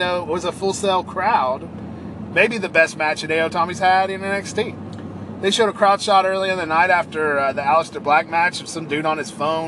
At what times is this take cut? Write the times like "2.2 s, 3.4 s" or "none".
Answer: 2.3 s, 5.4 s